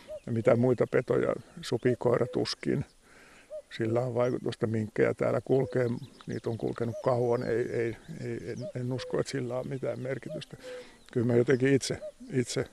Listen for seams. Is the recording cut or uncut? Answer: uncut